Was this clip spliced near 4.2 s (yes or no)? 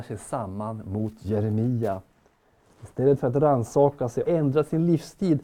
yes